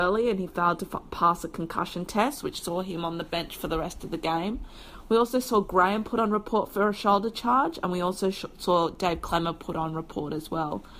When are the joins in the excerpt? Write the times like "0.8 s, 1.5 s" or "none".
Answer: none